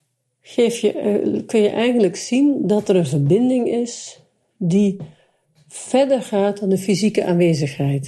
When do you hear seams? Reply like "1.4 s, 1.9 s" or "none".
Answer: none